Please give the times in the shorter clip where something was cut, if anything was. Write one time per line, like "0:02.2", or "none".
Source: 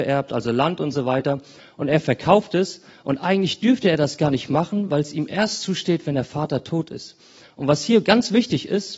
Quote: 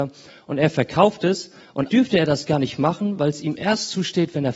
0:01.9